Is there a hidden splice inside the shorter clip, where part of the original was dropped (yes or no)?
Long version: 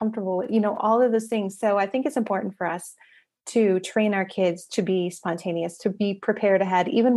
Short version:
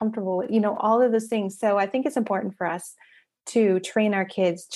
no